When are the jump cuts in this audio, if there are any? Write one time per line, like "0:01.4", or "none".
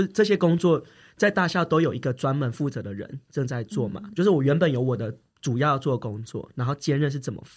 0:04.2